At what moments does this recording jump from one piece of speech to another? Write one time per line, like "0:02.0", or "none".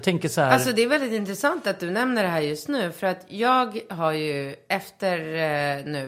none